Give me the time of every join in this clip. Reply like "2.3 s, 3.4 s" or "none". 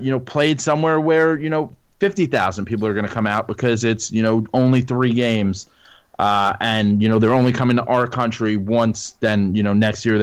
none